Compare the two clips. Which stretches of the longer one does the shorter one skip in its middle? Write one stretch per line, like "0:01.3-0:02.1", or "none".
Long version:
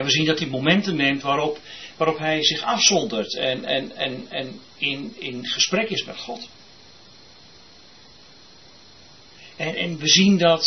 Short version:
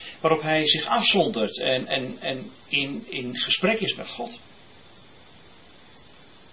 0:03.6-0:03.9